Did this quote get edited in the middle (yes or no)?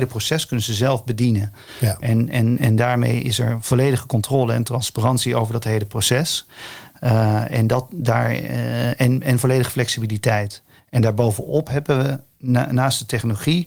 no